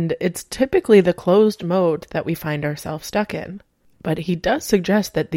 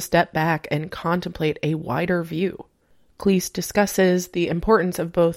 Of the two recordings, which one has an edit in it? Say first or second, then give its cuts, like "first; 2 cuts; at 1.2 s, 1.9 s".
first; 1 cut; at 3.9 s